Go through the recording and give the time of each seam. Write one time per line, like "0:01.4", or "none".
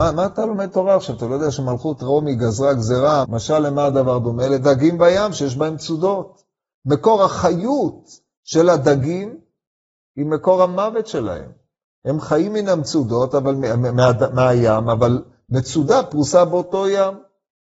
0:03.2